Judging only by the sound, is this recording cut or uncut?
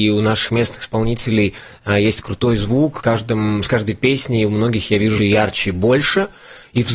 cut